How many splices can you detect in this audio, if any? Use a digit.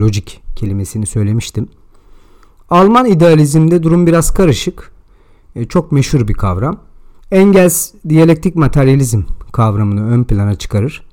1